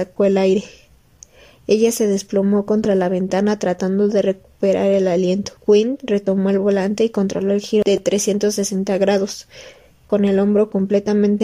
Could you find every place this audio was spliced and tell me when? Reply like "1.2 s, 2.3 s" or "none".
5.6 s